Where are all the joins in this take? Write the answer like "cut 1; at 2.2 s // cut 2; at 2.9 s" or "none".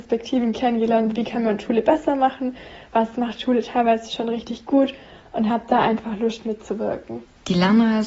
none